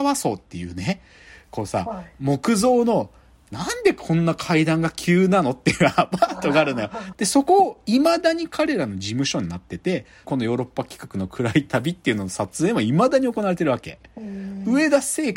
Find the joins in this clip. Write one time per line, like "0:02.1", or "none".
0:07.1
0:10.2